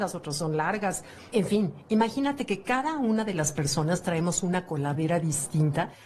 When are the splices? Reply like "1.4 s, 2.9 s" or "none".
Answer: none